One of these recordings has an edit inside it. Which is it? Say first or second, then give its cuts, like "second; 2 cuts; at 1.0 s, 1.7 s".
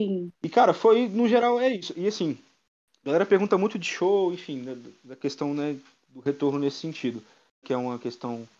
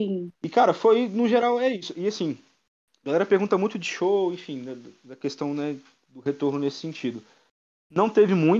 first; 1 cut; at 7.6 s